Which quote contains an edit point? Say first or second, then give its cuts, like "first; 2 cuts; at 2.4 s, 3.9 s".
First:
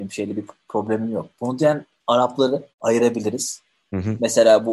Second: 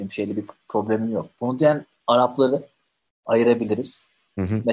first; 1 cut; at 2.7 s